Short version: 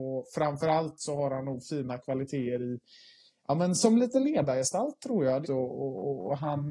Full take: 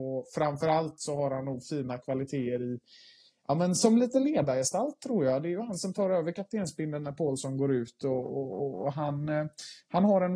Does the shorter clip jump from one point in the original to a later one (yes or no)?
yes